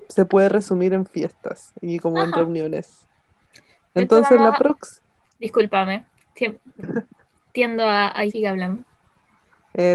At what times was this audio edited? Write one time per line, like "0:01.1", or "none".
0:05.2
0:08.3